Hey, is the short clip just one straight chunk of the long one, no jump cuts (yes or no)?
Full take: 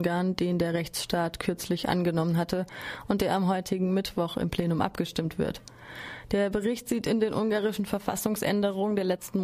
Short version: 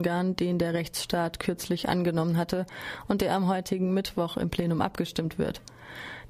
yes